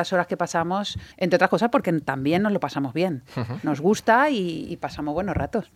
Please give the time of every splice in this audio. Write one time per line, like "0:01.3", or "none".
0:01.1